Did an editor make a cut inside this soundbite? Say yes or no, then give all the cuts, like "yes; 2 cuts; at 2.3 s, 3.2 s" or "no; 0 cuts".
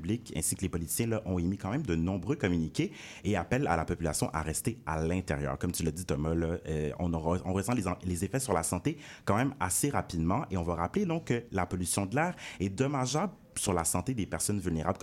no; 0 cuts